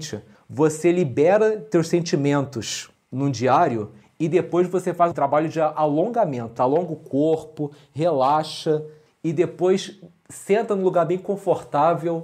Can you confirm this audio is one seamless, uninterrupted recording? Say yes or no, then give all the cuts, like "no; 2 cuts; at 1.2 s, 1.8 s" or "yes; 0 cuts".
no; 2 cuts; at 5.1 s, 6.6 s